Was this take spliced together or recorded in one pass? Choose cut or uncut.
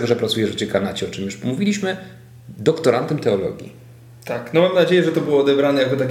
uncut